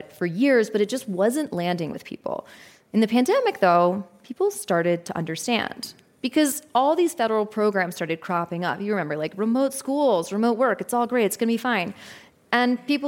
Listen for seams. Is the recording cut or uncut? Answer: uncut